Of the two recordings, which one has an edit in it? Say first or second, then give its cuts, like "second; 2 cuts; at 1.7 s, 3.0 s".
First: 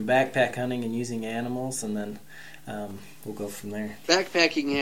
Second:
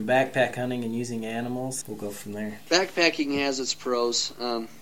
second; 1 cut; at 1.8 s